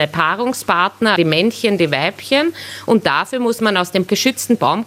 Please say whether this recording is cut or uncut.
cut